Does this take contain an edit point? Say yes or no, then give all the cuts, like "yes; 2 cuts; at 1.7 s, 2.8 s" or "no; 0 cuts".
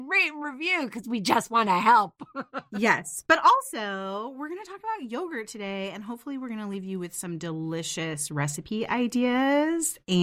no; 0 cuts